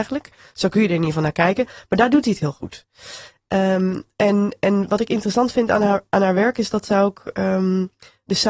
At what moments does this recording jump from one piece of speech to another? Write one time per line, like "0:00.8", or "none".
none